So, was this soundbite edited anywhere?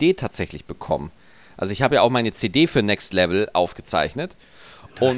no; 0 cuts

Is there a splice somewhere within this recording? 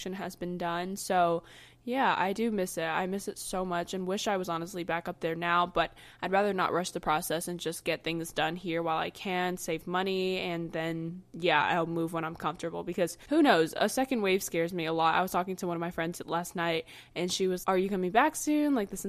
yes; 1 cut; at 17.6 s

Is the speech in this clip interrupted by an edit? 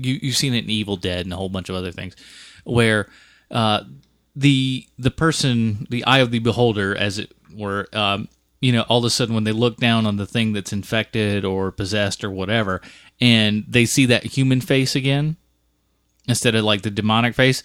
no; 0 cuts

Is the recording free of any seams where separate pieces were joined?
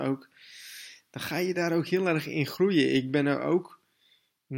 yes; 0 cuts

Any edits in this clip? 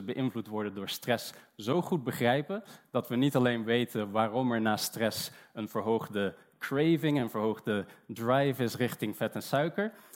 no; 0 cuts

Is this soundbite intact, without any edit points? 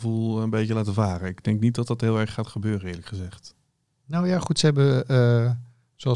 yes; 0 cuts

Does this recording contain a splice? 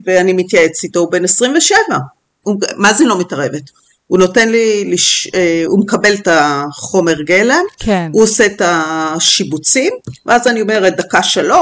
yes; 1 cut; at 2.4 s

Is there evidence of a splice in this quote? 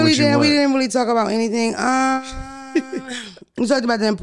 no; 0 cuts

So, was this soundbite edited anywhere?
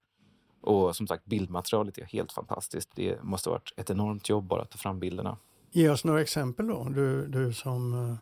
no; 0 cuts

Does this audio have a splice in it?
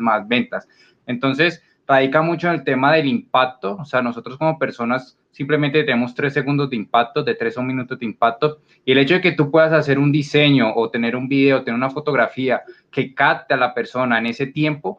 yes; 1 cut; at 1.0 s

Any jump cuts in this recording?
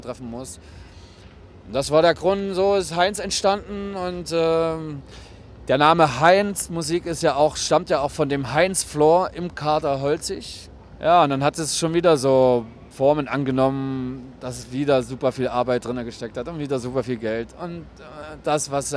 yes; 1 cut; at 11.0 s

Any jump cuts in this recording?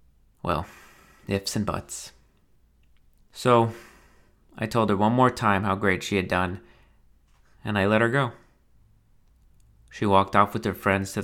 no; 0 cuts

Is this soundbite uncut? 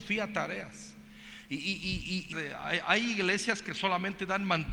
no; 1 cut; at 2.3 s

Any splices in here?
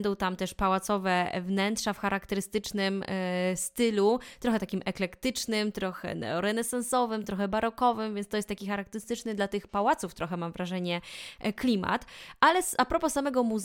no; 0 cuts

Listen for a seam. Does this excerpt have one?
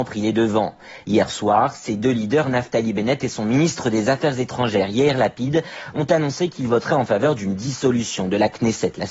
no; 0 cuts

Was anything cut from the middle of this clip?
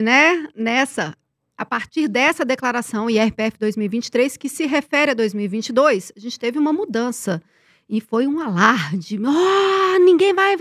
no; 0 cuts

